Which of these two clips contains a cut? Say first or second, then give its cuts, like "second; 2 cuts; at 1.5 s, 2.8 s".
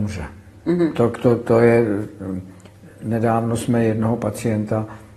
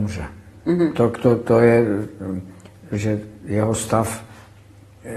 second; 1 cut; at 2.9 s